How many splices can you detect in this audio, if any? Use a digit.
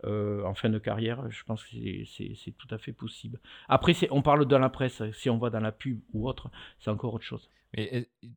0